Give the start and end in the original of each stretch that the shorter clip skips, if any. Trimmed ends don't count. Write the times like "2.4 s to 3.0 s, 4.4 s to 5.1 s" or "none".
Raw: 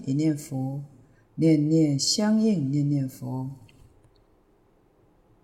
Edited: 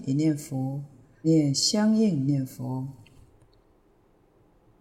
1.2 s to 1.7 s, 2.7 s to 2.9 s